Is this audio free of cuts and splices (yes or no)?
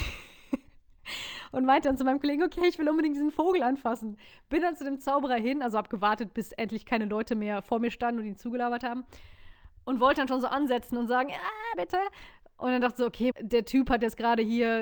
no